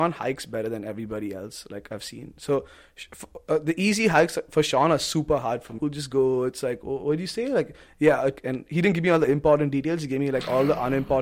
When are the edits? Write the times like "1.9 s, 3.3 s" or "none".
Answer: 5.8 s